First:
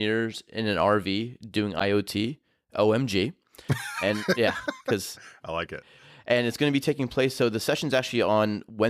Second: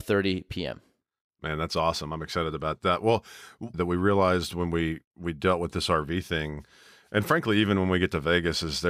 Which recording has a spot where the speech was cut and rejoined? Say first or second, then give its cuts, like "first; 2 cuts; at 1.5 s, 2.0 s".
second; 1 cut; at 3.7 s